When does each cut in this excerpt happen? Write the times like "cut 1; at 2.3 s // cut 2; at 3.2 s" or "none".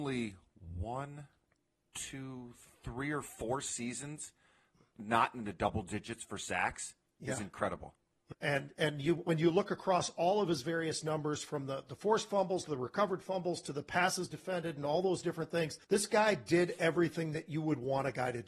cut 1; at 8.3 s // cut 2; at 15.8 s